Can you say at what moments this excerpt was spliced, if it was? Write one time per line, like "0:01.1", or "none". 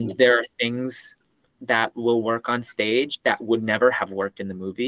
none